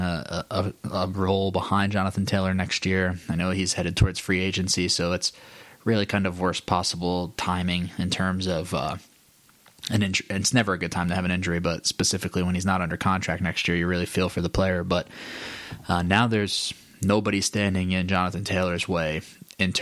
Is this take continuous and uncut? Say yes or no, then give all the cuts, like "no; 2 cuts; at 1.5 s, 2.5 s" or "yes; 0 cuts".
yes; 0 cuts